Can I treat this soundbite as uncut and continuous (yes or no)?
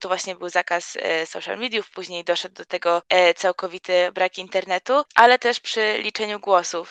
no